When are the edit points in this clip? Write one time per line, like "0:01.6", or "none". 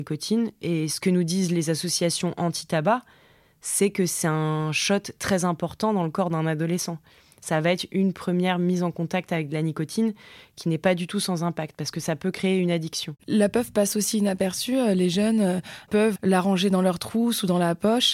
0:13.2
0:16.2